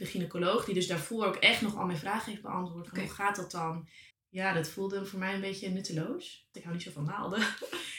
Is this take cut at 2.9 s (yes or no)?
no